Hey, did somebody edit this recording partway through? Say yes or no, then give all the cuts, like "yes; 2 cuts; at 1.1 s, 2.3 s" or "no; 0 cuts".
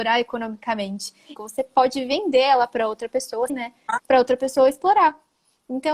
yes; 2 cuts; at 1.4 s, 3.5 s